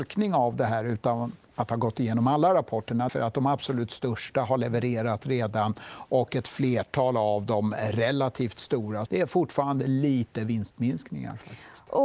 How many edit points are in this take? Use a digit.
2